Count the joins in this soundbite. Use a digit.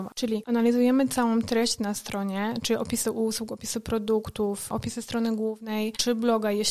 0